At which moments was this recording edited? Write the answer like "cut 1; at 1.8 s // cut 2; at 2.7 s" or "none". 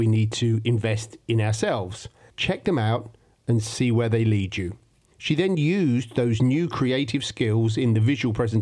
cut 1; at 2.3 s // cut 2; at 5.1 s